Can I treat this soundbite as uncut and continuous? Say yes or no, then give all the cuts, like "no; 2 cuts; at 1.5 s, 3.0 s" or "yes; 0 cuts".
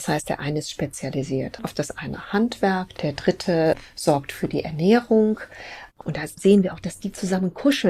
no; 2 cuts; at 2.9 s, 5.9 s